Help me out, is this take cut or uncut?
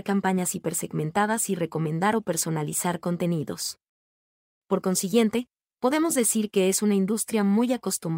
uncut